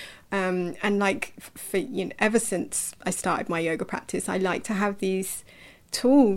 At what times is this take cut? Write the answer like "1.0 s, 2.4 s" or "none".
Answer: none